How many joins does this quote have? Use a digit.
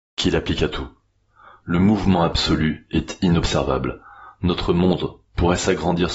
1